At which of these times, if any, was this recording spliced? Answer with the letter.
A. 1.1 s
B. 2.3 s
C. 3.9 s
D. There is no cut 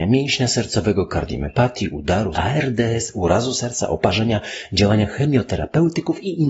B